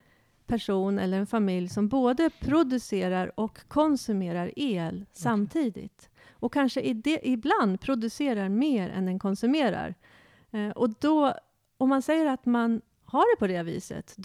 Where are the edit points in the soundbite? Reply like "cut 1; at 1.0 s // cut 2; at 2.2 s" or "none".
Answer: none